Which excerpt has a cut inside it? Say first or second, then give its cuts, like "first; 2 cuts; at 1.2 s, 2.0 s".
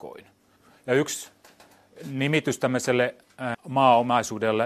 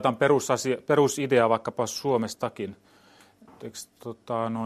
first; 1 cut; at 3.5 s